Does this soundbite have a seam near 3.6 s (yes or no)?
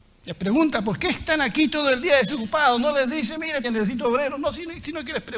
yes